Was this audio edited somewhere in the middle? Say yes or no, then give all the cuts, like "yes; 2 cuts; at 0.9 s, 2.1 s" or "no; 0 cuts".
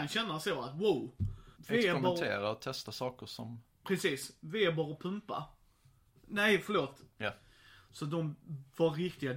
yes; 2 cuts; at 1.6 s, 7.2 s